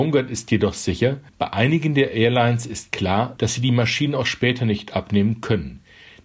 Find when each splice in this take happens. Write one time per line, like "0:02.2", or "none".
0:01.3
0:03.4